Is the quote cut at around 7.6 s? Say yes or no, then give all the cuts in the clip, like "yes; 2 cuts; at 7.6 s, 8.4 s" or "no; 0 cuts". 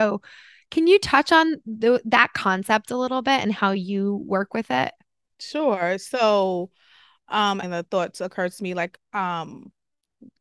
yes; 1 cut; at 7.6 s